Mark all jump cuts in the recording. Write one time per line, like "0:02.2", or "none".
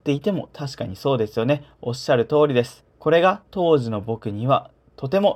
0:02.9